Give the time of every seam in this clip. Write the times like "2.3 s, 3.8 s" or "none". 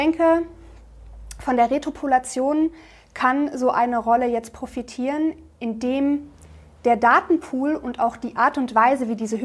none

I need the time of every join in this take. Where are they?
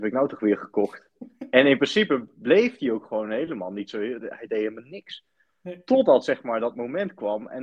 none

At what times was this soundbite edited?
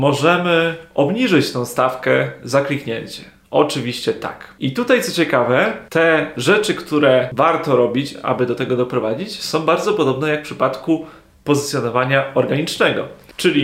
none

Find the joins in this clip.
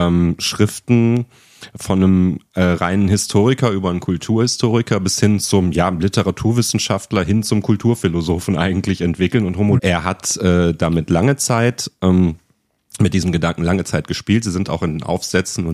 9.8 s

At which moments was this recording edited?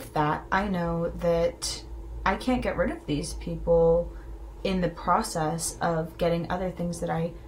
4.6 s

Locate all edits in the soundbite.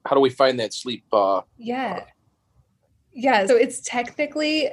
1.5 s, 3.5 s

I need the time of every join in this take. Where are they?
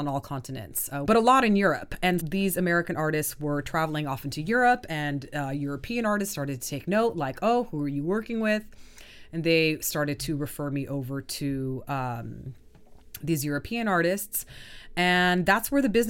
1.0 s, 2.2 s

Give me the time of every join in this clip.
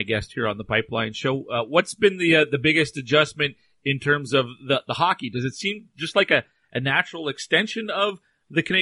none

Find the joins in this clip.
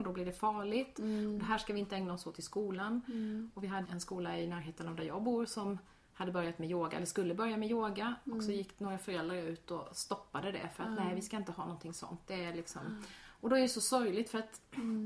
3.8 s

